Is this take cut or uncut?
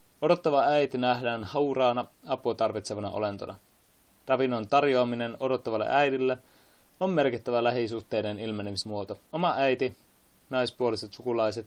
cut